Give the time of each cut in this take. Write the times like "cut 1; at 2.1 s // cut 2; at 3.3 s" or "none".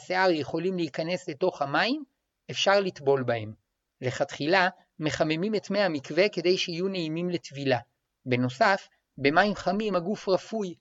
none